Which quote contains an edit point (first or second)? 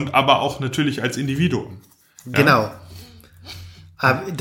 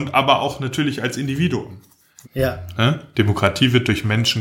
second